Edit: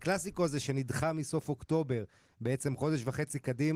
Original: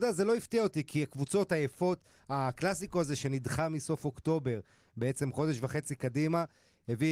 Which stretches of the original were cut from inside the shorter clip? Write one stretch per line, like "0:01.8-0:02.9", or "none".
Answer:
none